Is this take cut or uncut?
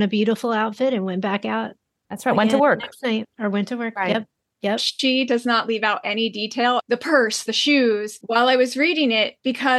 cut